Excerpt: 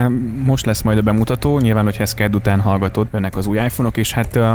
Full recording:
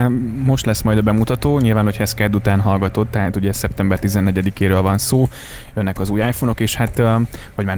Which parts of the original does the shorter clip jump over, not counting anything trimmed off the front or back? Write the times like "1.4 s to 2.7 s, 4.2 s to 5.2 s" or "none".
3.1 s to 5.7 s